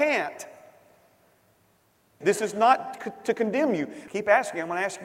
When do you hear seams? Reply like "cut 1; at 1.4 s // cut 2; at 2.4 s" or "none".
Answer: cut 1; at 2.2 s // cut 2; at 4.1 s